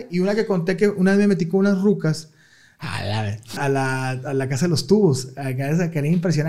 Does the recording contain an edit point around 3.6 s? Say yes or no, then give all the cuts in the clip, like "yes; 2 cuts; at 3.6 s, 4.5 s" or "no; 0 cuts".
yes; 1 cut; at 3.6 s